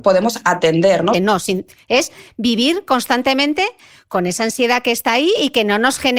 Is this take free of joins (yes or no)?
no